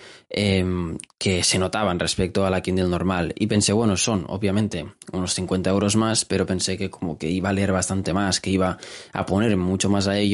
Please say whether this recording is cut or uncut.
uncut